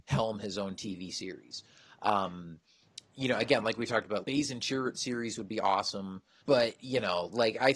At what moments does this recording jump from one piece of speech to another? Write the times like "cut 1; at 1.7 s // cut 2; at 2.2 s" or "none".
cut 1; at 4.2 s // cut 2; at 6.4 s